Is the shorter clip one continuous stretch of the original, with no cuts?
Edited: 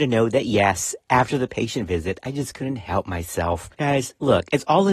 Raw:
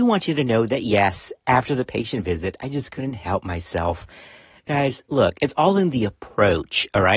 no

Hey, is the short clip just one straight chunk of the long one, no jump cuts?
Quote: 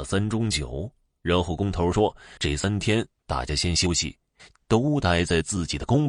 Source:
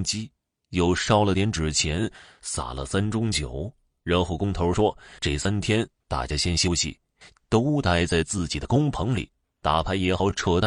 yes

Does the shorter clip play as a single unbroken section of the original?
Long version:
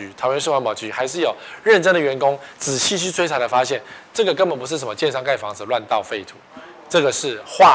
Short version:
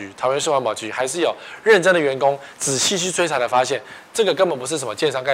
yes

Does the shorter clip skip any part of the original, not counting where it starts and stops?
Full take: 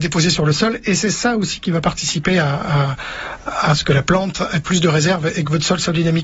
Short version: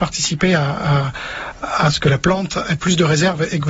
no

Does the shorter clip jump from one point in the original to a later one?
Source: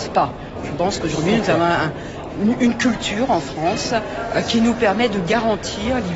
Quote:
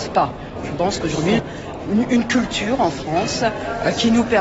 yes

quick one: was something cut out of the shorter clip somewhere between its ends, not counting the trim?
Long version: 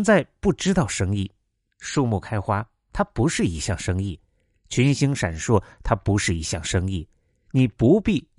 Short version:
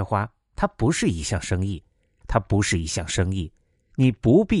yes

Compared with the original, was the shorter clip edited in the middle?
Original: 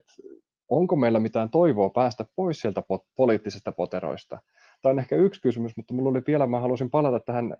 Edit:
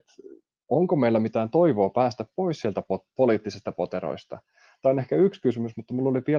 no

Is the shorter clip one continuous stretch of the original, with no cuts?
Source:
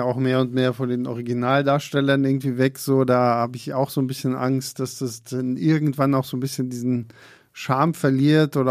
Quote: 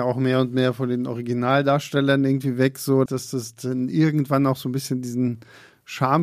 no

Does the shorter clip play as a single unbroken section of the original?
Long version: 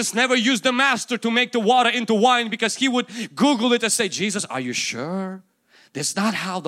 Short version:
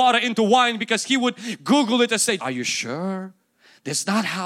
no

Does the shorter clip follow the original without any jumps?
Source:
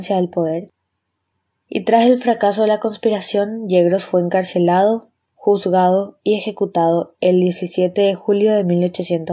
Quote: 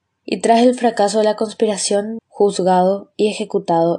no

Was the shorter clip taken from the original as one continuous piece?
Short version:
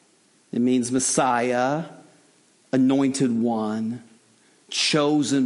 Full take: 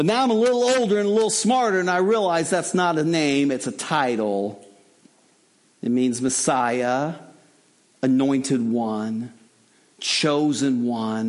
yes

